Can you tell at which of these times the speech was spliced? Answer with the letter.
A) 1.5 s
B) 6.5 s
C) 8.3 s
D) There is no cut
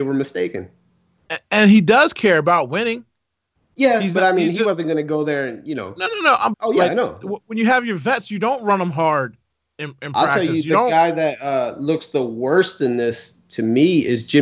B